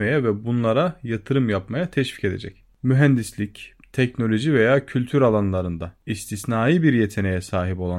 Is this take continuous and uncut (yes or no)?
no